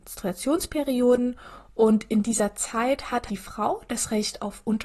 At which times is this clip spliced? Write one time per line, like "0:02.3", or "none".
0:03.3